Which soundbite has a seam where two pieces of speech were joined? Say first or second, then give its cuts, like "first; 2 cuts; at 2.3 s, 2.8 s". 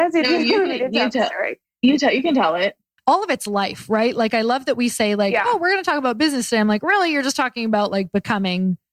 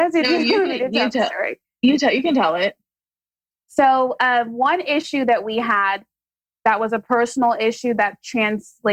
first; 1 cut; at 3.0 s